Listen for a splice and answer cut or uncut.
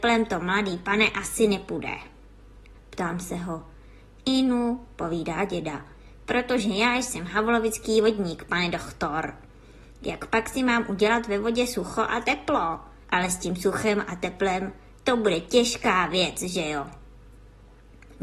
cut